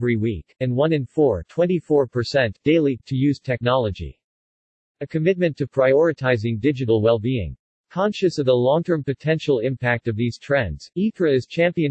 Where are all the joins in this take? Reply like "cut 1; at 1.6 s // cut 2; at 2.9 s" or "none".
none